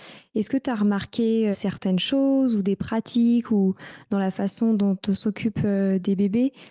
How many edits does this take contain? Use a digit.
1